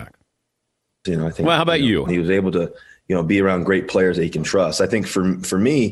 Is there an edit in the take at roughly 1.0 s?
yes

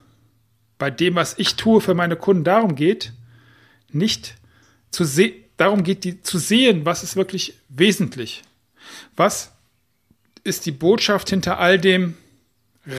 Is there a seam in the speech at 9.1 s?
no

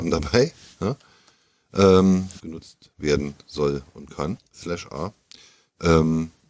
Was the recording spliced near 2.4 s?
yes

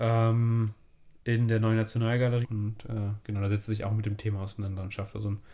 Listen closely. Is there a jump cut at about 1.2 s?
yes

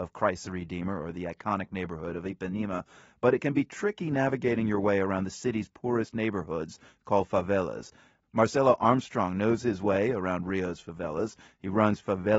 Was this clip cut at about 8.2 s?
yes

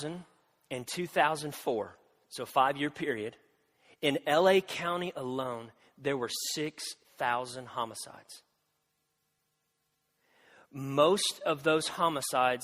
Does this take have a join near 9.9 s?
no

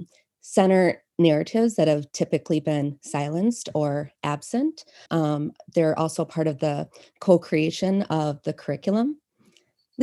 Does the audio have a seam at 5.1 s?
yes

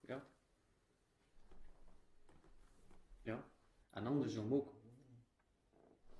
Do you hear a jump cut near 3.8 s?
yes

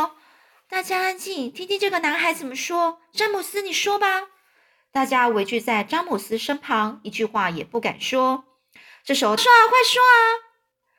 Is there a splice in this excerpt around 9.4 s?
yes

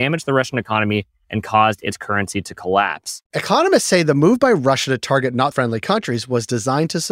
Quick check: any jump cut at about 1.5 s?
no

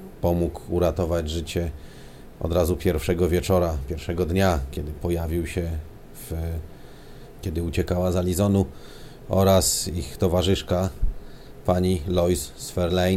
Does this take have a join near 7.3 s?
yes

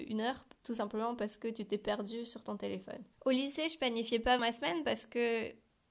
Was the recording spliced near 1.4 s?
no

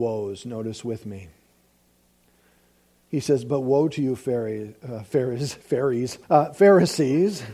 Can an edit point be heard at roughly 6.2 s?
yes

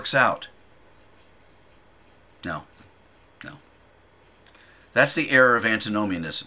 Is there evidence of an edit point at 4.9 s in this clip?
no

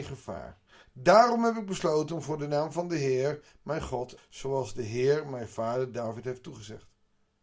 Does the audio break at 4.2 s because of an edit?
yes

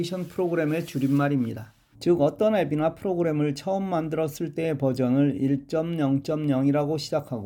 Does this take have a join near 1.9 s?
yes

